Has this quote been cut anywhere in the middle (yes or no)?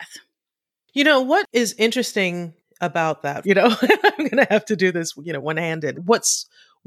yes